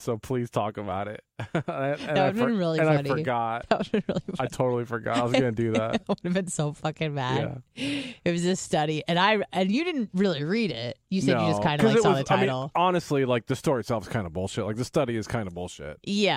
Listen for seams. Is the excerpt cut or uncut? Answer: uncut